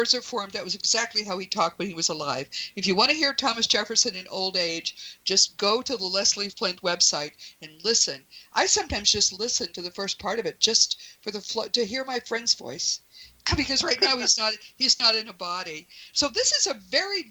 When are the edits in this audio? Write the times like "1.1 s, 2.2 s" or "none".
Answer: none